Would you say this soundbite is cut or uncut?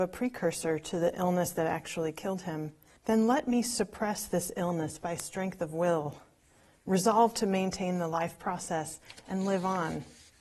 cut